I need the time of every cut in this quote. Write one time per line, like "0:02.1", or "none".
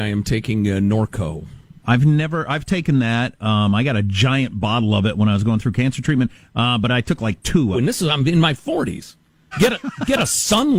0:07.7
0:09.5